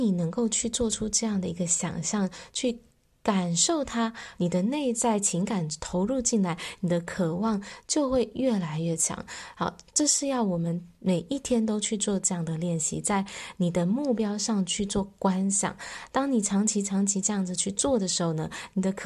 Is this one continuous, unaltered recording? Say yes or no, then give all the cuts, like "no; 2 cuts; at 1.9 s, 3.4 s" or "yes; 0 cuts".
no; 1 cut; at 4.3 s